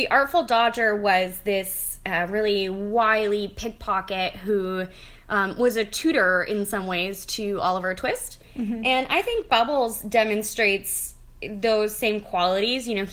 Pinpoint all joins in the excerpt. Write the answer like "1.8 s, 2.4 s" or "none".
none